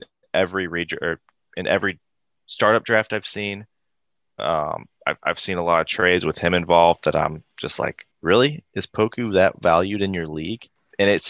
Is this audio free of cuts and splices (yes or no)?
yes